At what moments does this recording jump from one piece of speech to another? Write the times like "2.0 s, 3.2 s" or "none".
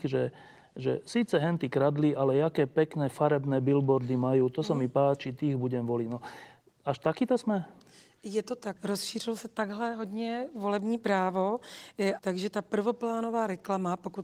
8.8 s, 12.2 s

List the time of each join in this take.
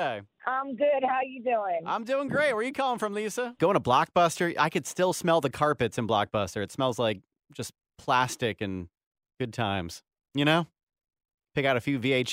3.6 s

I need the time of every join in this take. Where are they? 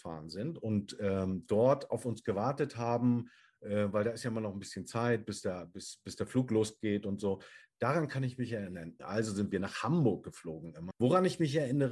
9.0 s, 10.9 s

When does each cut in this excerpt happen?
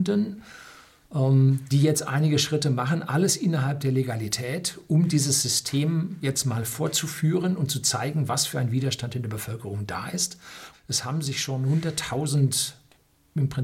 10.7 s

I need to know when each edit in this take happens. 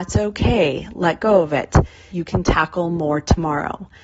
2.1 s

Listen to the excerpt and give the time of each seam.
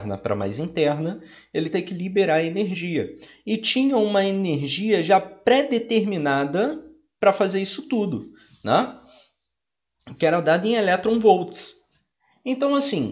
none

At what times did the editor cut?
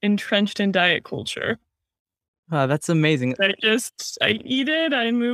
3.4 s

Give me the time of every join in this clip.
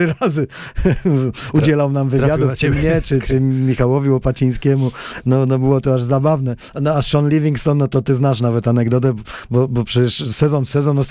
none

